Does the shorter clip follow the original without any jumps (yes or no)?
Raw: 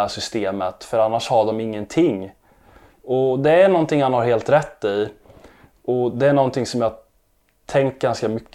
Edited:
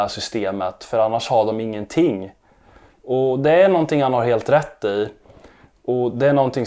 yes